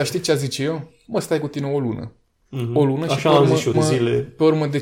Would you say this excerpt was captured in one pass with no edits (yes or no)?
no